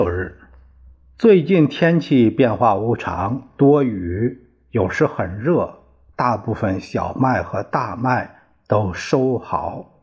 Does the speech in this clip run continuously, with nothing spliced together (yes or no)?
yes